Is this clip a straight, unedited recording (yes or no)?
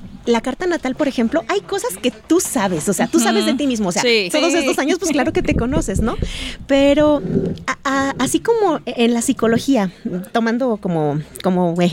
no